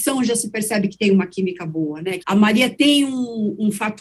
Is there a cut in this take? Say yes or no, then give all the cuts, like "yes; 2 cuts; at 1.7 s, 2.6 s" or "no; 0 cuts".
yes; 1 cut; at 2.2 s